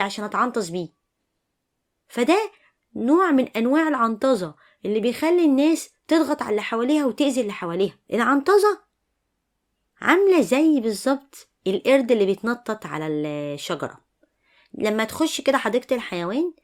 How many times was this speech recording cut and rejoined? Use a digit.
1